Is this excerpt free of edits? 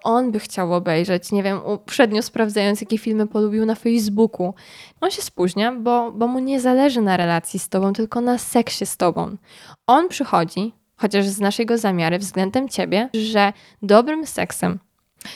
no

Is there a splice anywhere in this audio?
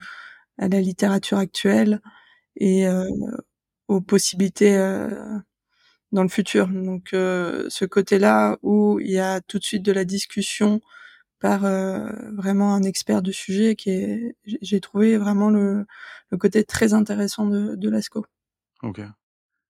no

